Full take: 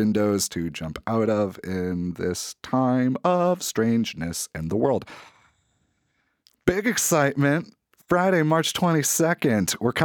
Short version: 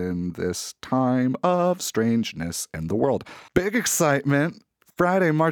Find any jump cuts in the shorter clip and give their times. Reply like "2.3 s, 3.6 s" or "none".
3.5 s